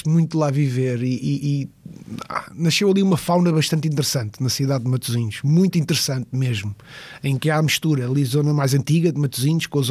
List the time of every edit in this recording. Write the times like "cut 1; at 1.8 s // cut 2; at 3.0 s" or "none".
none